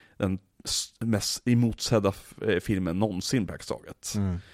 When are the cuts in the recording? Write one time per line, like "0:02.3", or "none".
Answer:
none